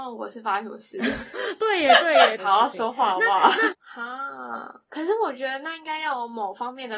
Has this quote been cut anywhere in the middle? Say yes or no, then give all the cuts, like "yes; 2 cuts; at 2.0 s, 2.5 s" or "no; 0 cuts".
yes; 3 cuts; at 1.3 s, 2.4 s, 3.7 s